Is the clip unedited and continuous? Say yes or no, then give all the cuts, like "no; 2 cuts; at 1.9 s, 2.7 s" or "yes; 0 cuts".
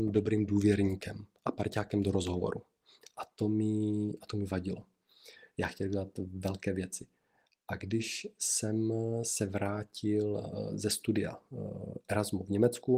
no; 1 cut; at 3.0 s